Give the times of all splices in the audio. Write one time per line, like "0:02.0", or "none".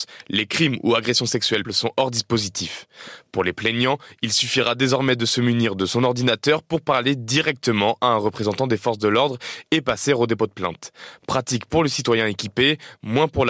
0:01.6